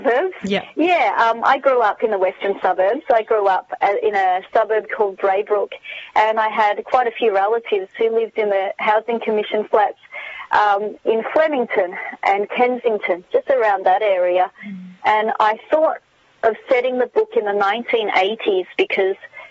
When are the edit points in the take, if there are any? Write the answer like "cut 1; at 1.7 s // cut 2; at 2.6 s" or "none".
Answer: none

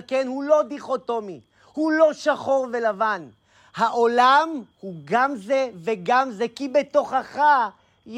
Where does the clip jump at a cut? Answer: cut 1; at 4.7 s

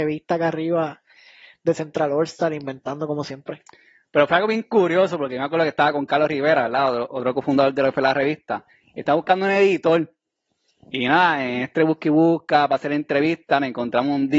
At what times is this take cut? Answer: none

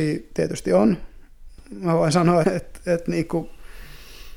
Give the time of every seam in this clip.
cut 1; at 2.4 s

